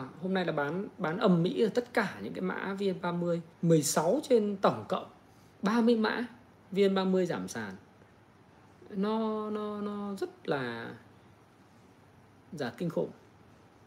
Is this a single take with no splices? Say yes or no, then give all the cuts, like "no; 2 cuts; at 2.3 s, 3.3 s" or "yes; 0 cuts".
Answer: no; 1 cut; at 3.5 s